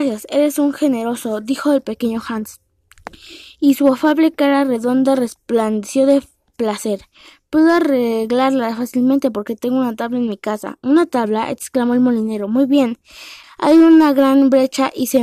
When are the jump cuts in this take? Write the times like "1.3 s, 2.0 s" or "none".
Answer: 13.4 s

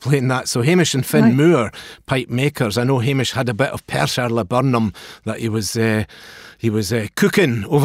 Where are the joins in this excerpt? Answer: none

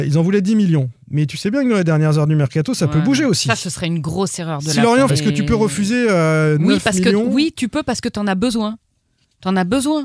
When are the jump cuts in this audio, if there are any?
5.1 s

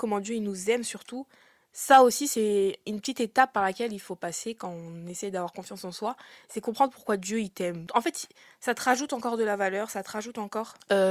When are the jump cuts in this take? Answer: 7.9 s

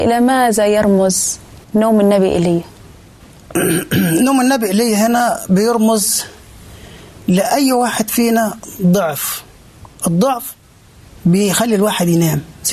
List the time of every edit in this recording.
1.6 s, 9.9 s

